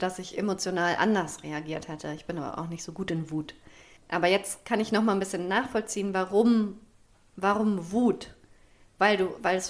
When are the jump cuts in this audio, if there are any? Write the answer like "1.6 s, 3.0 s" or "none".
none